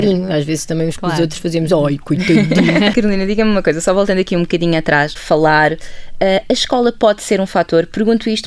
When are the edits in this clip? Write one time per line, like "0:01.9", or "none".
0:02.9
0:05.2